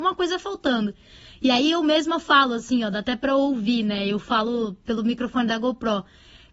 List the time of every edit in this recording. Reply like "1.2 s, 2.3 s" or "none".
none